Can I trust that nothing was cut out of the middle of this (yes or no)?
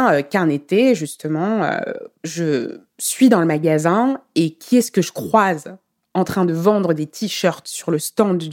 yes